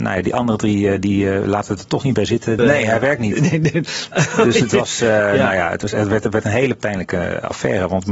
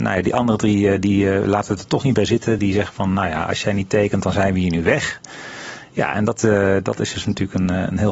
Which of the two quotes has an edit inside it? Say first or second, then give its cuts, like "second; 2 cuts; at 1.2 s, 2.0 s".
first; 1 cut; at 2.6 s